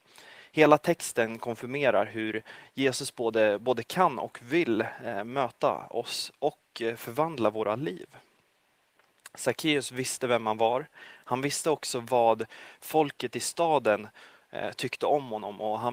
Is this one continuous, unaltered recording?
yes; 0 cuts

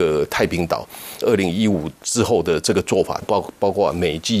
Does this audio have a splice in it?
yes; 2 cuts; at 1.2 s, 3.2 s

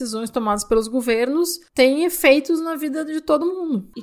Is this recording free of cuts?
yes; 0 cuts

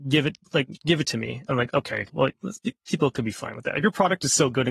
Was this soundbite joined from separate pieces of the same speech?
no; 0 cuts

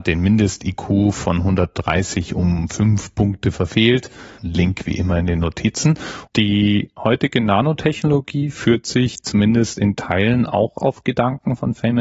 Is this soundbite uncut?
no; 2 cuts; at 4.4 s, 6.3 s

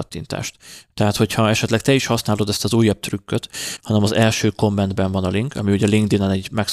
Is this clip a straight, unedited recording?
no; 2 cuts; at 0.9 s, 3.8 s

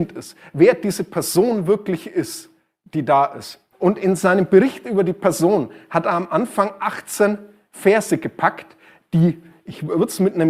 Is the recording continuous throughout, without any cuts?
no; 1 cut; at 3.7 s

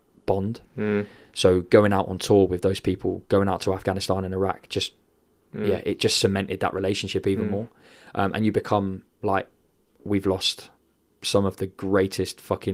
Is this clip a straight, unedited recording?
yes; 0 cuts

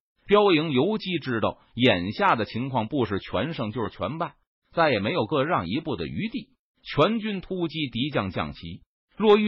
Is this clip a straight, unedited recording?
yes; 0 cuts

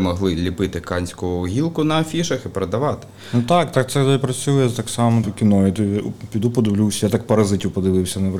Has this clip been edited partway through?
yes; 1 cut; at 5.2 s

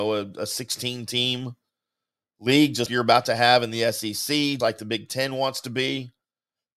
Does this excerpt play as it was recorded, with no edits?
no; 2 cuts; at 2.9 s, 4.6 s

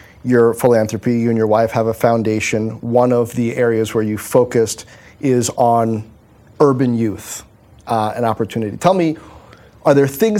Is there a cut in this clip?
no; 0 cuts

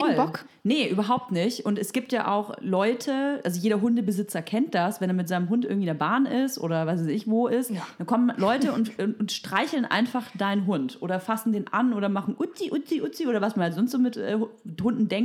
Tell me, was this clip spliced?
no; 0 cuts

